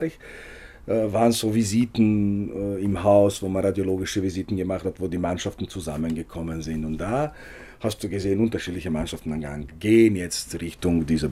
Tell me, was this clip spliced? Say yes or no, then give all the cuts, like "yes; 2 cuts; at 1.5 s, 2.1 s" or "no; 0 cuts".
no; 0 cuts